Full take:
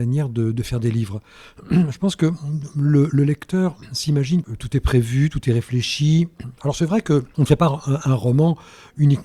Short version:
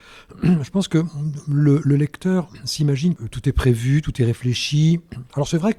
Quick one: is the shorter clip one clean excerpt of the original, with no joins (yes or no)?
yes